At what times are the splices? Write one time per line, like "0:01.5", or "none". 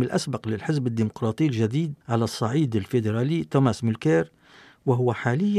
0:02.0